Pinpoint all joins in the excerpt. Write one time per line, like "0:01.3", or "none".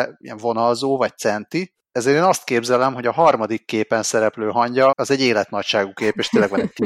0:04.9